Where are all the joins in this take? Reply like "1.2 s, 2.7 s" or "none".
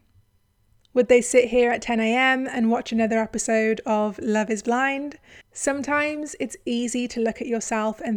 5.4 s